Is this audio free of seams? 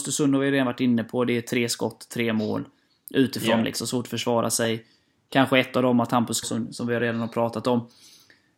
no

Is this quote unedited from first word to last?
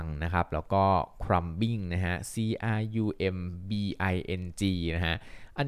yes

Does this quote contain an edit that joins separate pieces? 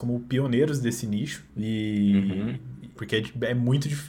yes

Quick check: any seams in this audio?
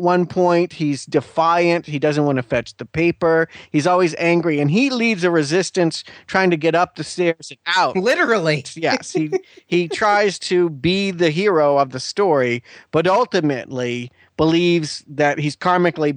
no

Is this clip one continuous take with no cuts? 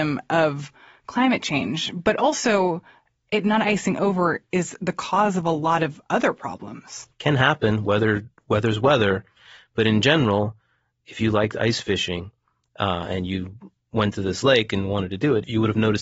no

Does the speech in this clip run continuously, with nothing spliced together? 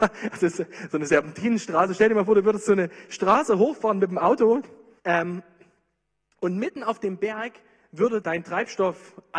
no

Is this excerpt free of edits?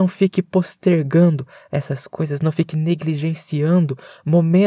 yes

